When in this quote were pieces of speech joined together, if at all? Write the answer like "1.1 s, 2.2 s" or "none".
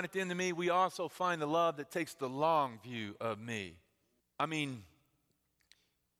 4.2 s